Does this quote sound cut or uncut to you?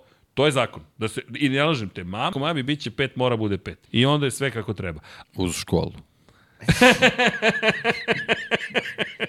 cut